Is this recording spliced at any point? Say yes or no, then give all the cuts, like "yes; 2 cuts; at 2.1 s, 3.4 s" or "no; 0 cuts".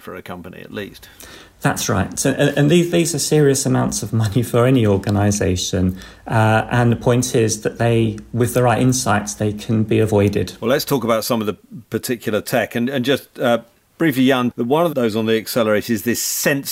yes; 1 cut; at 14.5 s